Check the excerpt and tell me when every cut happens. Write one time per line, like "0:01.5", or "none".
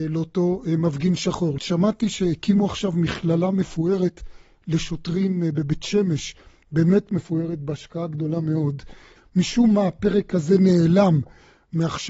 0:01.6
0:09.2